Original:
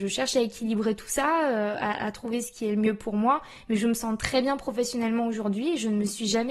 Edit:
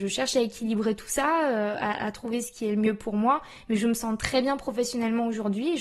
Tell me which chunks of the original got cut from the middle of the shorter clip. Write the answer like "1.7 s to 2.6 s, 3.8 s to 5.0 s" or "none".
none